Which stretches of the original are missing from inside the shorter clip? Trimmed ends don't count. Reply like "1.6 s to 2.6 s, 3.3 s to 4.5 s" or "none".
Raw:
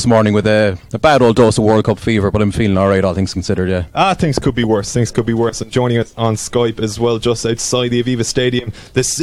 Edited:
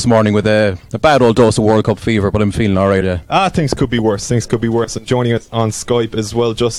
3.0 s to 3.7 s